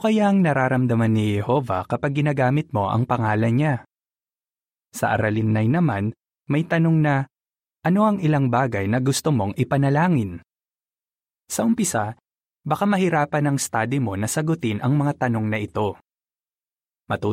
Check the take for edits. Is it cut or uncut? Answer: uncut